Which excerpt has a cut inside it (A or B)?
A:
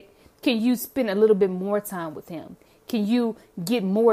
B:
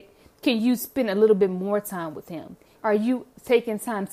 B